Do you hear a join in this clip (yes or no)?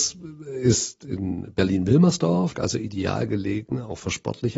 yes